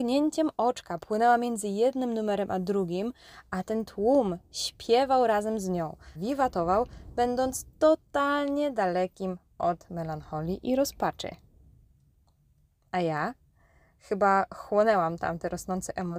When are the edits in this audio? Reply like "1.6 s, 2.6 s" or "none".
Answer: 6.1 s